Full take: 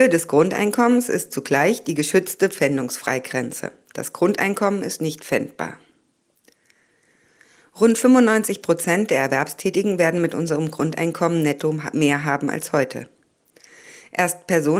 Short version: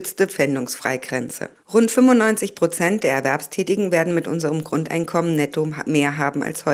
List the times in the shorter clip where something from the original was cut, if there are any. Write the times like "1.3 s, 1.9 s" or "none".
1.6 s